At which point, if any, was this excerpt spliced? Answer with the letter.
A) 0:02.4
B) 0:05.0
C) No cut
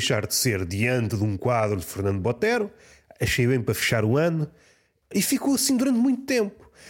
B